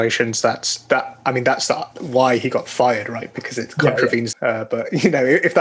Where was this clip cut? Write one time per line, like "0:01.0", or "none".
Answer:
0:04.3